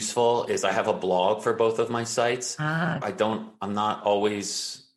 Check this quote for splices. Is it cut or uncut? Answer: cut